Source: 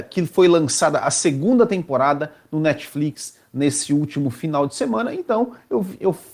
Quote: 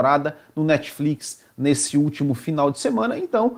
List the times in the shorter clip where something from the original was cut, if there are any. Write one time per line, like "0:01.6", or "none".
none